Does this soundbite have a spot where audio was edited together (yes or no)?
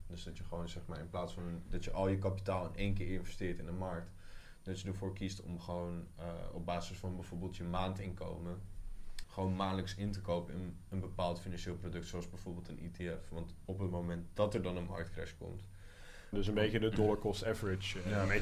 yes